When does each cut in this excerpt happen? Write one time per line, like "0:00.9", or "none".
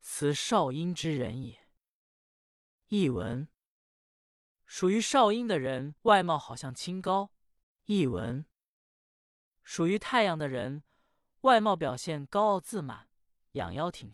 0:06.0
0:07.6